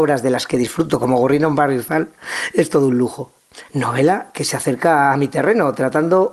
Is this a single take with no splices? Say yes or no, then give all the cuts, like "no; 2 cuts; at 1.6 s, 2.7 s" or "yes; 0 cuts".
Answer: no; 1 cut; at 3.7 s